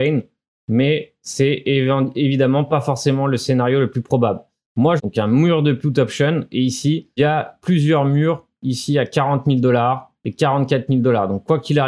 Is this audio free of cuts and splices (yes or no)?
no